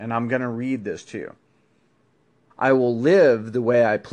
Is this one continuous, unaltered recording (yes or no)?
no